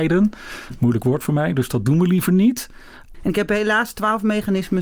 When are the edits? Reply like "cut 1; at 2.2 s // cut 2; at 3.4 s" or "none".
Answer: cut 1; at 3.1 s